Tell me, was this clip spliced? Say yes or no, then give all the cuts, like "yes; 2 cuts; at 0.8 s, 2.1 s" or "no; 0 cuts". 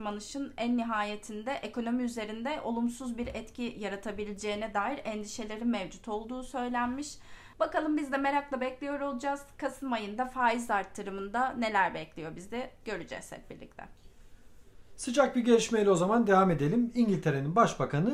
yes; 1 cut; at 7.5 s